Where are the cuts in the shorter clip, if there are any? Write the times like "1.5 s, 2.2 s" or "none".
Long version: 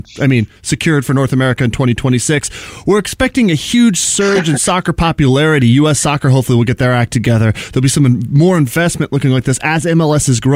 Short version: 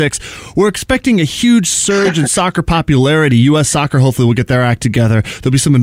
none